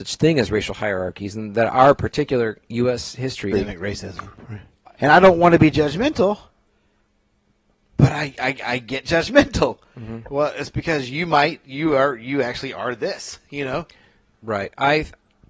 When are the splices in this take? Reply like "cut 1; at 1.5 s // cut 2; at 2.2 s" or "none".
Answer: cut 1; at 3.5 s // cut 2; at 5.0 s